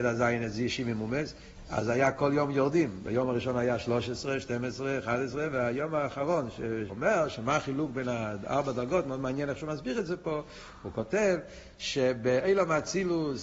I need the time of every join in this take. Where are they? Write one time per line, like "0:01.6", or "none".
0:06.9